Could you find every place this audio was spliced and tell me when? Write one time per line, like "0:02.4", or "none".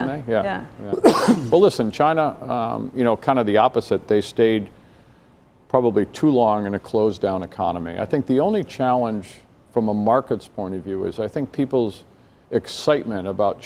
none